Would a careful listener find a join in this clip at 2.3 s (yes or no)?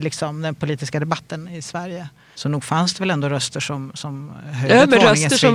yes